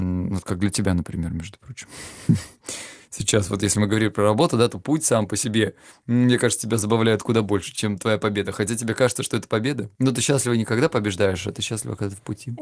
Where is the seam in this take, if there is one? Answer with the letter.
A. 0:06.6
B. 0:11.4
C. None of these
C